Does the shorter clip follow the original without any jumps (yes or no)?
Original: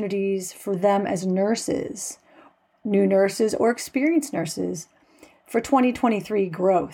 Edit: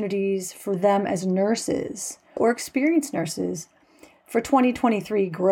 no